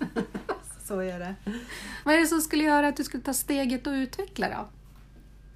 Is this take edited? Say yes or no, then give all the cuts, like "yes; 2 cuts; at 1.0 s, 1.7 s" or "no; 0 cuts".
yes; 1 cut; at 2.0 s